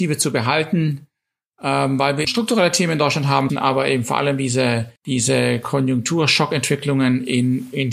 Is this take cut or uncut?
cut